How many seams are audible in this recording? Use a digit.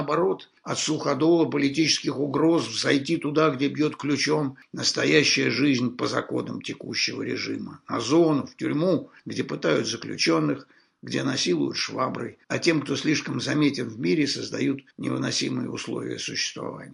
2